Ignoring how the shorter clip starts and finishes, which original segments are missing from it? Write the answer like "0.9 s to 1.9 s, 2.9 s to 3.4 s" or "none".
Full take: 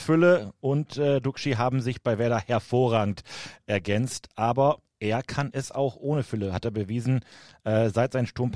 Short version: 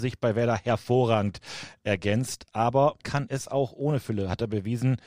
4.8 s to 5.2 s